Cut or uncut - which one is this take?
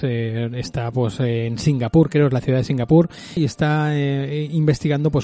cut